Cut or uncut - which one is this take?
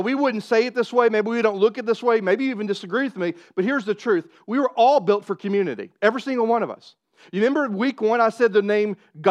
uncut